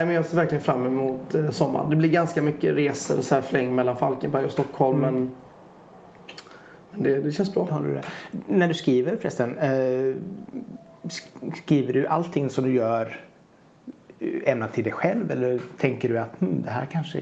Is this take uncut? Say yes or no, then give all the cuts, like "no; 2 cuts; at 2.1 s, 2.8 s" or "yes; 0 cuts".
yes; 0 cuts